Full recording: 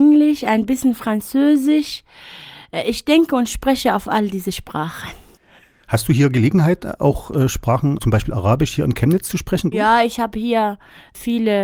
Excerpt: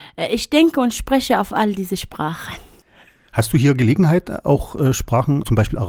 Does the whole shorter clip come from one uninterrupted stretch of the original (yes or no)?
yes